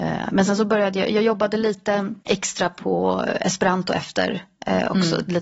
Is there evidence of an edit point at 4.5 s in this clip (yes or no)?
no